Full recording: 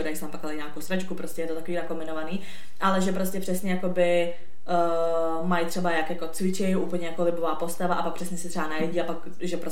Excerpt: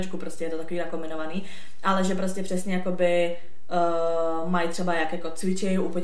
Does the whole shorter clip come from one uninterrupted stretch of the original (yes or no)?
yes